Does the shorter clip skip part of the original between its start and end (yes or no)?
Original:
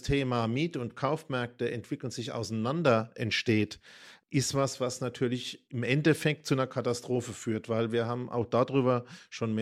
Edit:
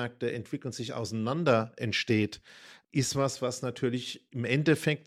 no